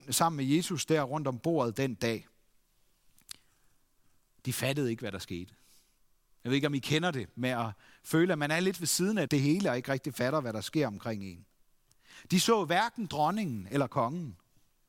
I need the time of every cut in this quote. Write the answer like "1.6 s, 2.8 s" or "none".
9.3 s